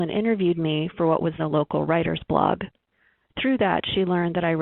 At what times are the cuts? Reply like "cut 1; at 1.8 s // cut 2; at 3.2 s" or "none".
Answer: cut 1; at 1.4 s